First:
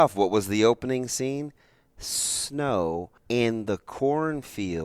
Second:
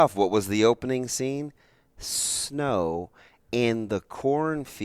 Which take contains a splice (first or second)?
first